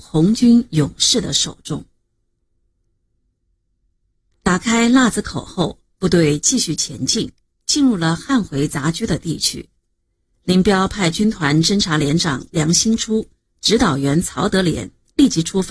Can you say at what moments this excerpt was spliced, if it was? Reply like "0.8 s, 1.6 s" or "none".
none